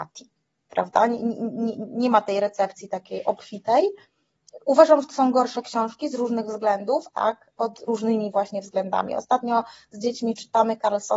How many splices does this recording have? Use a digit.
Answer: 1